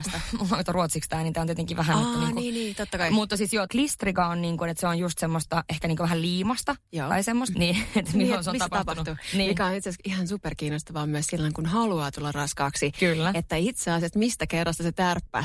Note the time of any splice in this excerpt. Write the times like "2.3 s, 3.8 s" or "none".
3.7 s, 7.5 s